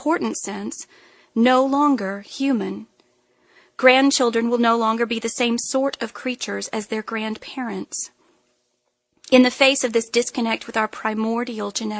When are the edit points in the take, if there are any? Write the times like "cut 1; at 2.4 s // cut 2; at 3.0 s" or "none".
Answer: none